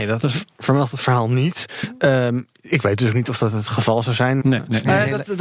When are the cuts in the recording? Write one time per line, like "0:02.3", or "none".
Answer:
0:04.4